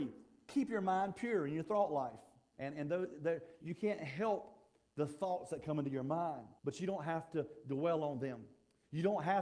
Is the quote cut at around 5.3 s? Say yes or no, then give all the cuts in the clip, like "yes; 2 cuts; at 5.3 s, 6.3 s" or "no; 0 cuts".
no; 3 cuts; at 2.5 s, 3.6 s, 6.6 s